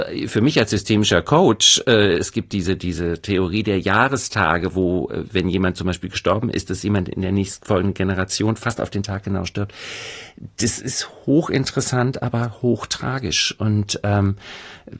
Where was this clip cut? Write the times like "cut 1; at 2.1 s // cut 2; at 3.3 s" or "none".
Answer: none